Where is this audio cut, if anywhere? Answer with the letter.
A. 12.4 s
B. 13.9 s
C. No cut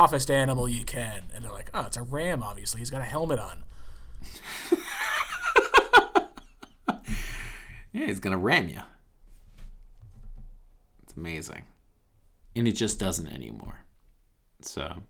A